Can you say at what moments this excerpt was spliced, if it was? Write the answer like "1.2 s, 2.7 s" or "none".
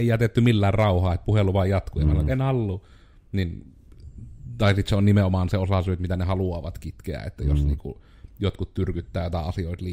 none